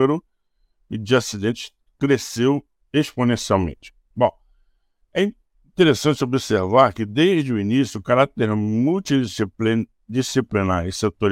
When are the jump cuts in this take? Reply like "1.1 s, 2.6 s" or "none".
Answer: 4.1 s